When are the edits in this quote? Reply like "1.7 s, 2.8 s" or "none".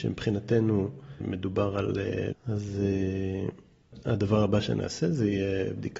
1.2 s, 2.3 s